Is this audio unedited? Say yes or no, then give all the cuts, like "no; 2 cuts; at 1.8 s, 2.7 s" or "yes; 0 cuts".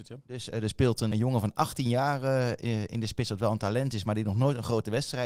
no; 1 cut; at 1.1 s